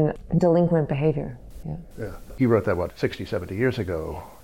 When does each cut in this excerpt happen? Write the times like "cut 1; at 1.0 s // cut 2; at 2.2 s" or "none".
cut 1; at 1.6 s